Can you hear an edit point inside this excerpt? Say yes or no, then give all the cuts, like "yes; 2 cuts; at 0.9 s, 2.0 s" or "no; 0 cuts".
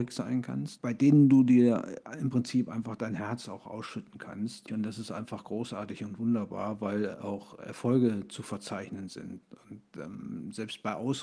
yes; 1 cut; at 4.7 s